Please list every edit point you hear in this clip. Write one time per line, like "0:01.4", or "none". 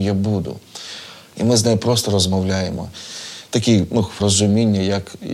0:01.3
0:04.2